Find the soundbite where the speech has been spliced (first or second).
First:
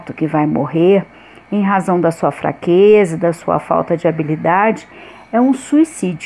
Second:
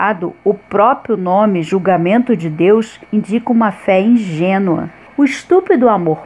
second